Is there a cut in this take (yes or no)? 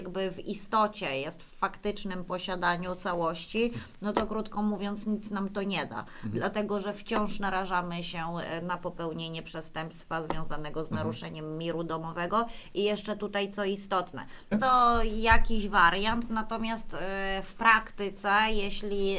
yes